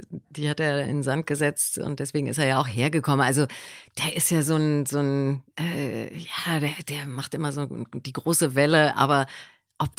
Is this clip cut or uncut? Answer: uncut